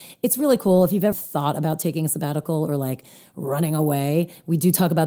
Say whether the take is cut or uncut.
cut